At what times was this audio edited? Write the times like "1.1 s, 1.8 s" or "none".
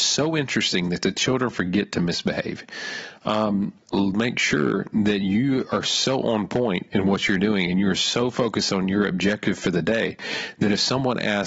3.8 s